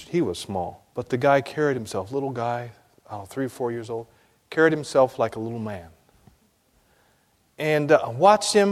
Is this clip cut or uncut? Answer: cut